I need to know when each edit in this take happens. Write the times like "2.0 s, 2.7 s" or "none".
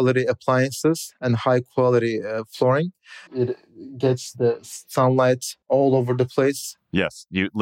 3.3 s, 5.6 s